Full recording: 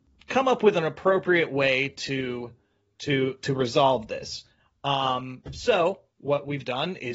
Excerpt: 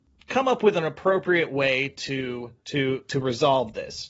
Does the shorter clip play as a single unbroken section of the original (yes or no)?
no